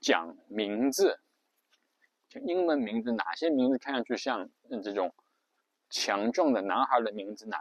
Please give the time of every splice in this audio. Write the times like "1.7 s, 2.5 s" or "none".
none